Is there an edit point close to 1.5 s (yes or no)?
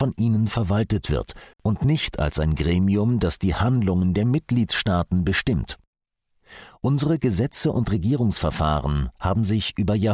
yes